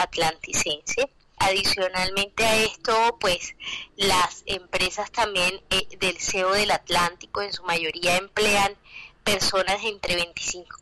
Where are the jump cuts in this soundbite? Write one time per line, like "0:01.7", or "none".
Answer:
none